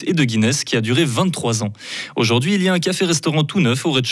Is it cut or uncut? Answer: uncut